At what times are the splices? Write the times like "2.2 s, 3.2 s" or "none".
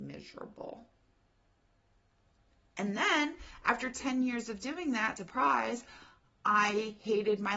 5.2 s

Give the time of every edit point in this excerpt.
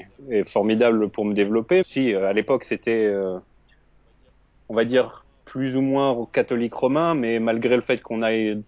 1.8 s

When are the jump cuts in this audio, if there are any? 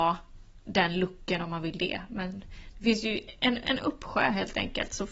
none

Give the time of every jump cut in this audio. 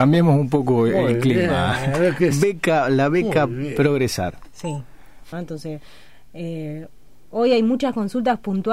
5.3 s

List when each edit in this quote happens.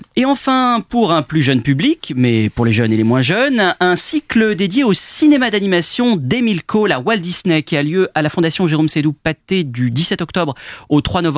none

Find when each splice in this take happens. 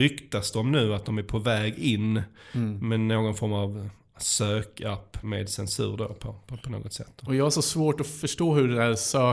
5.2 s

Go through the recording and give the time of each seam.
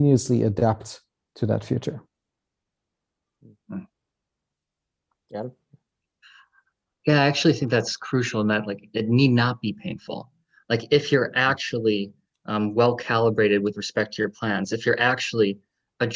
none

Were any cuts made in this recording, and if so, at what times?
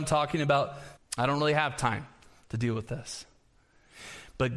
1.0 s

